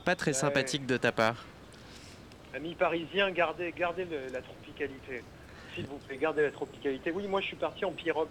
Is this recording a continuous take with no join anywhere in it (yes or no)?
yes